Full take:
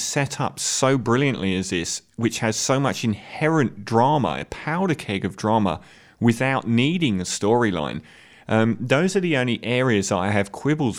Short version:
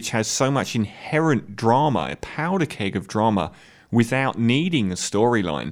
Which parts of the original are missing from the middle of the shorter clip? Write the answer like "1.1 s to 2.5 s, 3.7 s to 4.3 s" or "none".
none